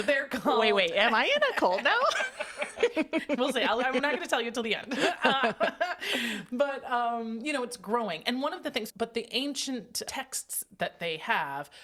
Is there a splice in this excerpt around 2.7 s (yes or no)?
no